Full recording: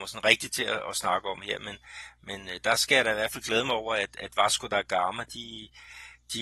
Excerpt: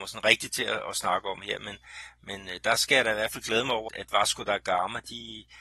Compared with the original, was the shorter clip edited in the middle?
yes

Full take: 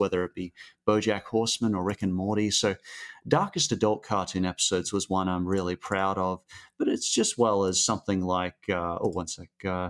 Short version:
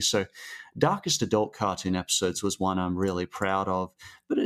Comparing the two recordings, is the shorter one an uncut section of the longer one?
yes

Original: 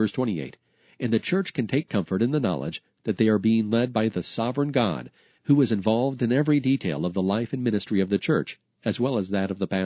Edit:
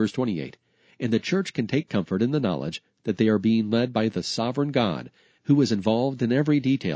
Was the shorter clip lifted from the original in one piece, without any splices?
yes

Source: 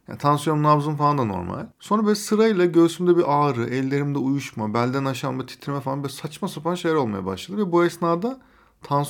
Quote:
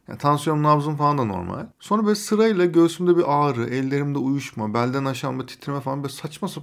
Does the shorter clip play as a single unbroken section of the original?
yes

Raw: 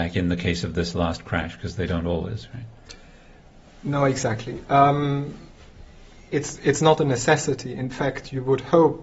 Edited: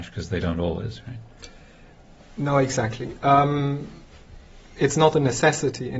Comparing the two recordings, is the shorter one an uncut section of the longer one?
no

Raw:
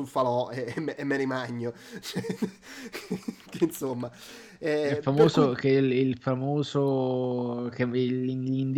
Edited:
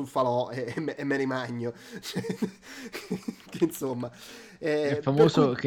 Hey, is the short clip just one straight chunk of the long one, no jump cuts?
yes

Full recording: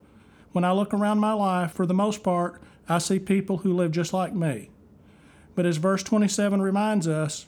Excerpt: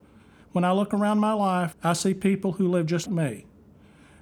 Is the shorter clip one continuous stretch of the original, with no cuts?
no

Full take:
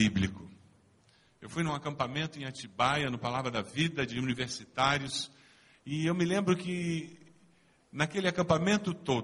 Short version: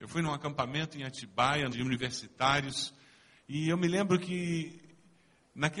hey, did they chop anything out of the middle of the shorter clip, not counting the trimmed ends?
yes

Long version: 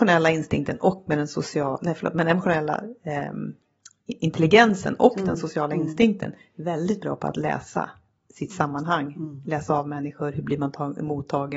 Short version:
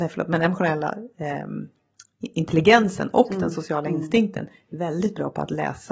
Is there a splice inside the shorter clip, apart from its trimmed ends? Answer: no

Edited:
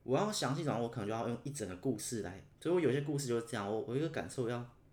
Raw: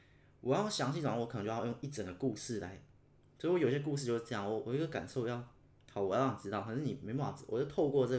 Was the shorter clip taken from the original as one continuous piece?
no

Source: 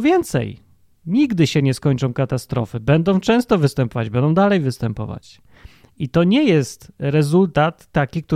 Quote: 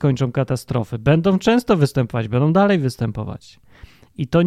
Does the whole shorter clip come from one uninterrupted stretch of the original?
yes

